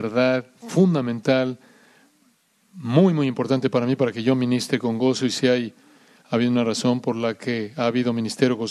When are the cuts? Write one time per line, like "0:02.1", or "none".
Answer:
none

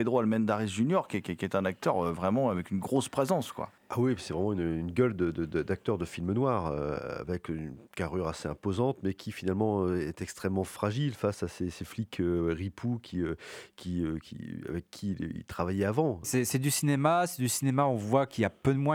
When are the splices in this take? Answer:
none

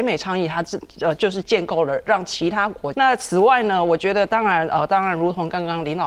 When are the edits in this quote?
0:01.4
0:02.9

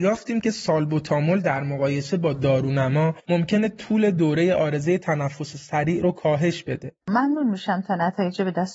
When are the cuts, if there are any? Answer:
0:07.0

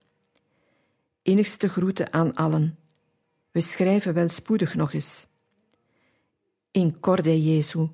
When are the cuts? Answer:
none

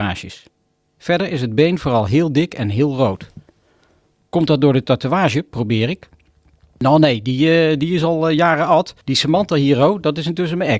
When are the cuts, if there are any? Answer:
none

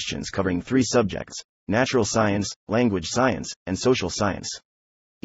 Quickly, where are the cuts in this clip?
none

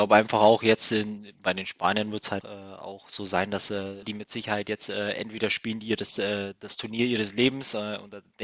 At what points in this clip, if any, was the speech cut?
0:02.4
0:04.0

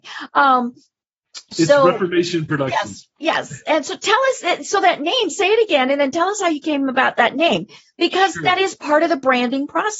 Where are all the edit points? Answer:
none

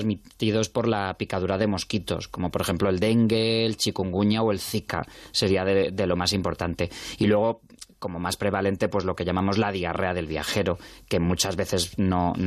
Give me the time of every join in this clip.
none

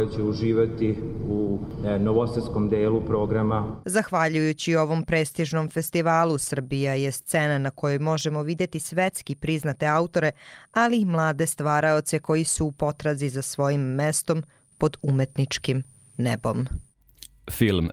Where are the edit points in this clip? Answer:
none

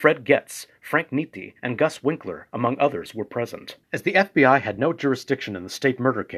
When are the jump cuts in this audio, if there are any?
0:03.8

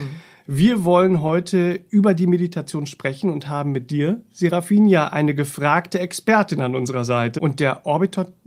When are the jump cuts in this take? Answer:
0:07.4

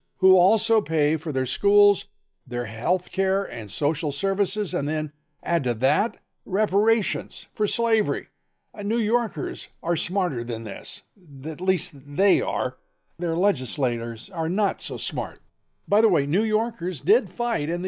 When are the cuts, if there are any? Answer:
none

